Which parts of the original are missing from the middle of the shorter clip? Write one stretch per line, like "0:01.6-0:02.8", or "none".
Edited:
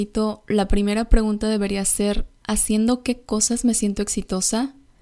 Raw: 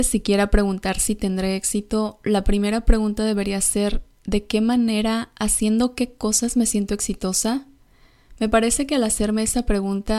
0:04.2-0:05.3